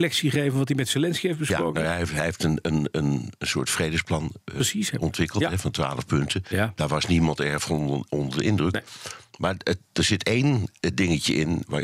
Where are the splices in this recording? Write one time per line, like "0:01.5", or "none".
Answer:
none